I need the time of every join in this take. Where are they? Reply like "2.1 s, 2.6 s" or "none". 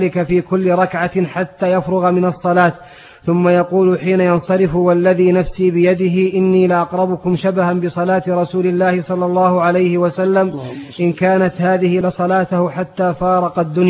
12.0 s